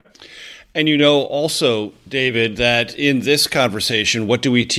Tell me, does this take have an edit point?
no; 0 cuts

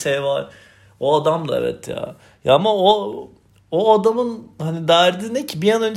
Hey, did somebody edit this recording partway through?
no; 0 cuts

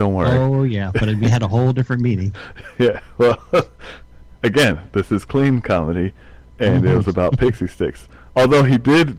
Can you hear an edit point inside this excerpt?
no; 0 cuts

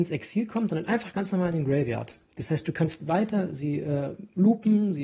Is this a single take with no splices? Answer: yes; 0 cuts

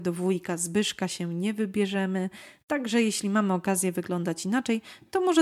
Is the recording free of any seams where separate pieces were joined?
yes; 0 cuts

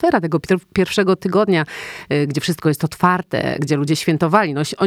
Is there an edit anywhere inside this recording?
yes; 1 cut; at 3.6 s

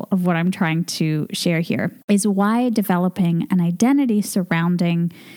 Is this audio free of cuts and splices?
no; 1 cut; at 2.0 s

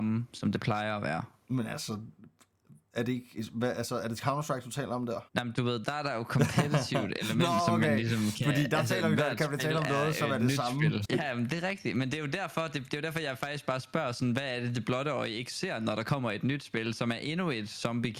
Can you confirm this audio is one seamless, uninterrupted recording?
no; 2 cuts; at 5.3 s, 11.0 s

